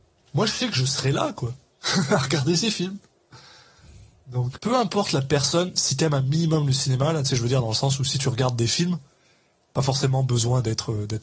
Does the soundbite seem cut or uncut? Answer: cut